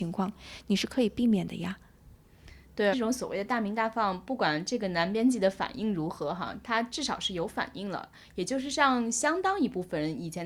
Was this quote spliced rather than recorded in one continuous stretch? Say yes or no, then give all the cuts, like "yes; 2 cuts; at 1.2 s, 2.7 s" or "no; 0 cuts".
yes; 1 cut; at 2.9 s